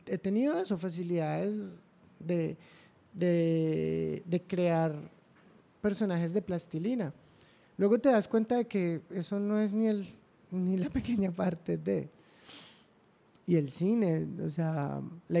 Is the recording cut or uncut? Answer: uncut